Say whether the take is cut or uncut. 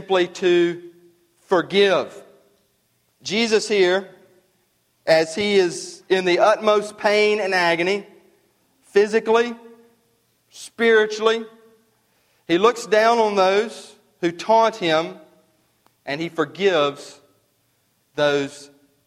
cut